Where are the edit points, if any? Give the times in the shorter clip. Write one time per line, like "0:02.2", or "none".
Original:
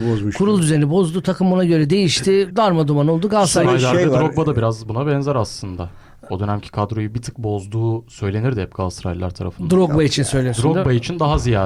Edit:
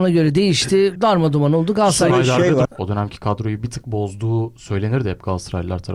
0:02.6